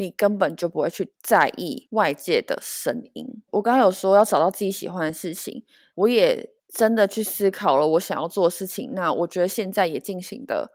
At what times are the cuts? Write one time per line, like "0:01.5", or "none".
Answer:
0:03.5